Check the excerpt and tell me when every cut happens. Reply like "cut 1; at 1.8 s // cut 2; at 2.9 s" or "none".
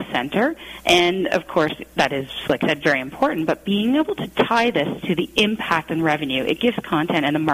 none